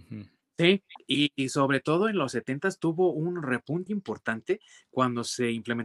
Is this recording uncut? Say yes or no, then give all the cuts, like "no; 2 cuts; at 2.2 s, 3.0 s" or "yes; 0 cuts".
no; 1 cut; at 3.9 s